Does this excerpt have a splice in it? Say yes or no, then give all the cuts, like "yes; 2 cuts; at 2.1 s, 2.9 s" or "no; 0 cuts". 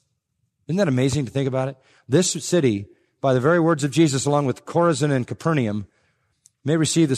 no; 0 cuts